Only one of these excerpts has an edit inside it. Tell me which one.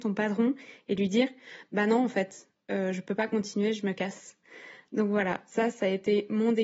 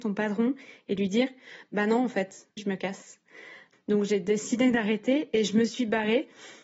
second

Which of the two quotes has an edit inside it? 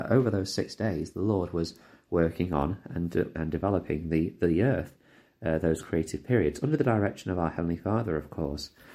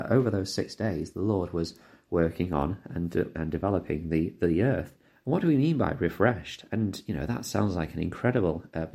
second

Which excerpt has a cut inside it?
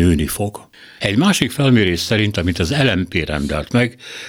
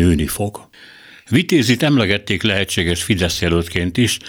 first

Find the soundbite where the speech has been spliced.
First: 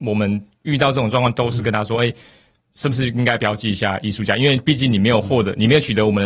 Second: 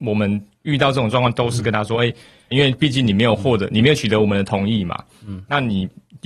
second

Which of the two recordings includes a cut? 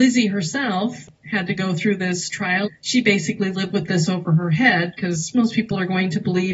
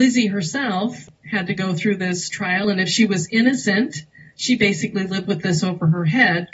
first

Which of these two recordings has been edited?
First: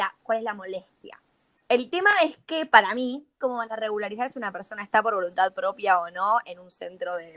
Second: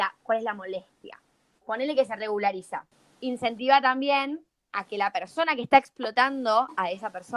second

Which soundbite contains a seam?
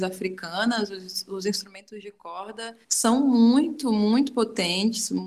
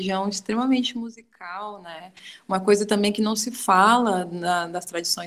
first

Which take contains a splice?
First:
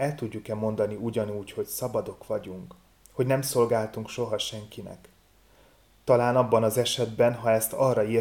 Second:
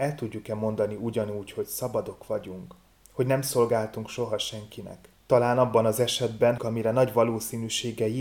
second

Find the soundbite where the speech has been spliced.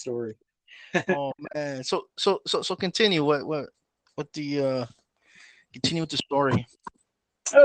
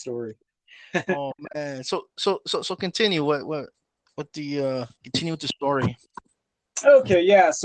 second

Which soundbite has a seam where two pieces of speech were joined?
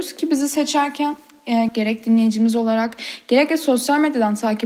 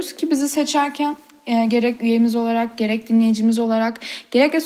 first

